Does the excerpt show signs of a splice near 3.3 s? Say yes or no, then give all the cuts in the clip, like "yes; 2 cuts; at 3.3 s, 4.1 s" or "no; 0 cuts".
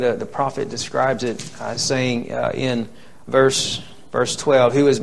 yes; 1 cut; at 3.3 s